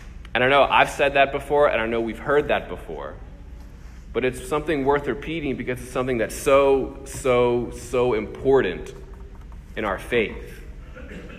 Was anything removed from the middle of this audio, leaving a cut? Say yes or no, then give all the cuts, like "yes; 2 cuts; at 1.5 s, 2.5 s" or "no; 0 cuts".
no; 0 cuts